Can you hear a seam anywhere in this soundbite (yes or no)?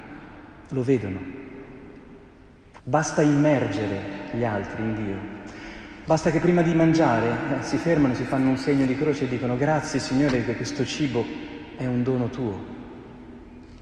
yes